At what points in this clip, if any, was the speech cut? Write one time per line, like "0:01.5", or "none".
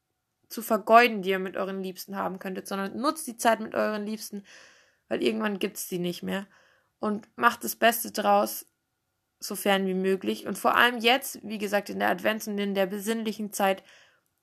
none

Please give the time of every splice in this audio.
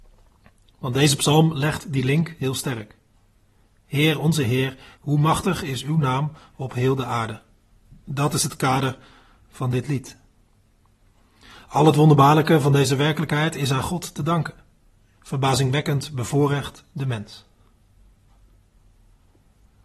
0:15.2

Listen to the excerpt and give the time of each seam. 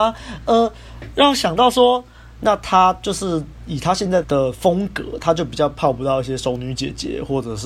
0:02.4
0:04.2

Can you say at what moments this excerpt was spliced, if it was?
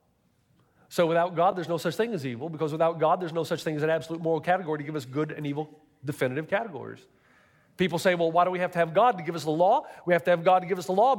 none

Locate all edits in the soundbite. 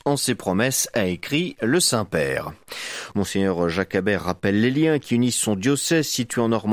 0:03.1

